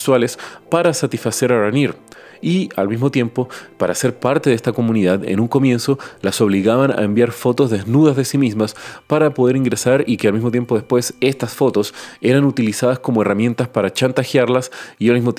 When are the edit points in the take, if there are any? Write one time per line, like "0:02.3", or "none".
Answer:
none